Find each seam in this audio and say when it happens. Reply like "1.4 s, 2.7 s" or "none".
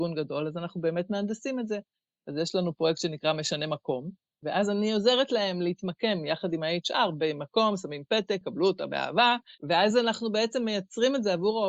4.4 s, 8.4 s, 9.6 s